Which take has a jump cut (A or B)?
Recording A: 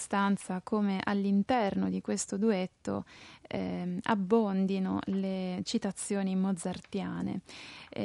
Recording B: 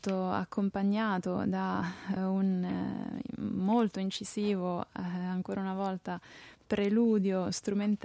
B